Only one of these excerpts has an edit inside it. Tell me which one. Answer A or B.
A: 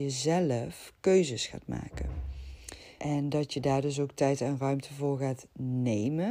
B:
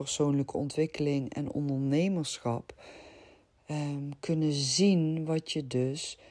A